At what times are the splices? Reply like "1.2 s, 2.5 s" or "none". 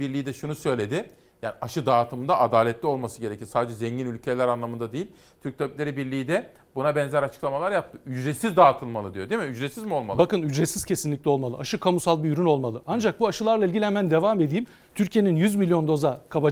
none